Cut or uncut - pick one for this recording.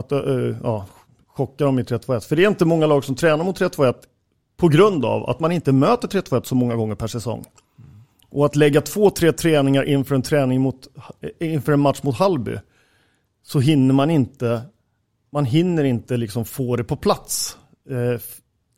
uncut